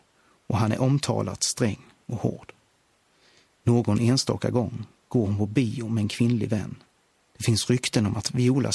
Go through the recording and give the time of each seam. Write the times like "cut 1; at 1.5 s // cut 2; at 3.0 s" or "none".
cut 1; at 3.5 s // cut 2; at 7.2 s